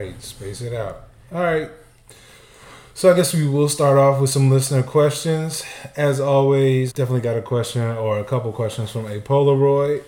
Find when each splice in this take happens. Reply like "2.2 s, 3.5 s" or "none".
6.9 s